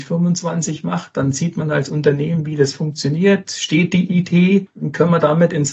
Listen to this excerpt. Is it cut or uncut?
uncut